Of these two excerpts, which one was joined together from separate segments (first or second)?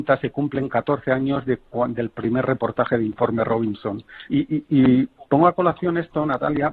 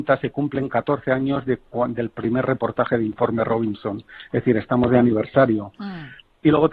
first